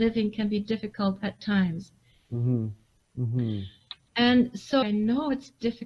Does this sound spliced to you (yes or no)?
yes